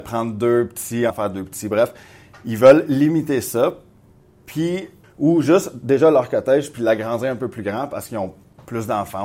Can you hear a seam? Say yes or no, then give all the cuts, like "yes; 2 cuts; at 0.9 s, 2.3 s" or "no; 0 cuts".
yes; 2 cuts; at 1.1 s, 5.0 s